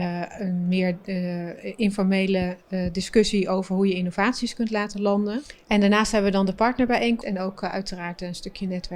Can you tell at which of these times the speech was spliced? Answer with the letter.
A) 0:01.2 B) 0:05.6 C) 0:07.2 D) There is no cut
C